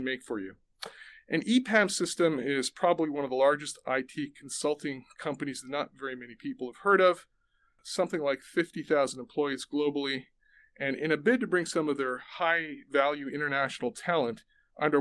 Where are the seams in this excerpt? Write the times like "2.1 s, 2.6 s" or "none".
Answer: none